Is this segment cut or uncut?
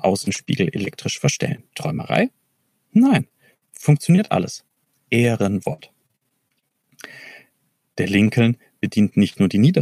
cut